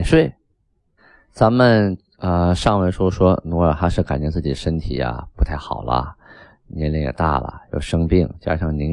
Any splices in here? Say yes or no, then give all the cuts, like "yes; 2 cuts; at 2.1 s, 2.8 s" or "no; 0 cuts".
no; 0 cuts